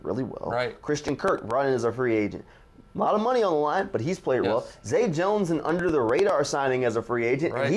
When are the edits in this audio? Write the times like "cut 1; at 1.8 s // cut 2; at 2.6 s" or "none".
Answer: cut 1; at 4.4 s